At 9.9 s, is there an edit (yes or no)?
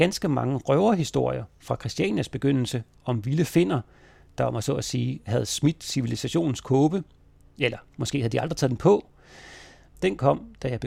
yes